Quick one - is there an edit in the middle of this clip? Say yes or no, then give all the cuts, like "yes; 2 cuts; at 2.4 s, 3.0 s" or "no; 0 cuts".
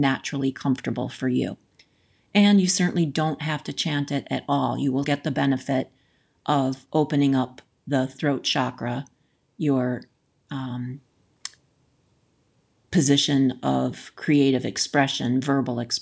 yes; 1 cut; at 5.0 s